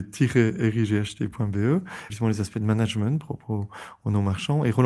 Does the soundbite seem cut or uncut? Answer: cut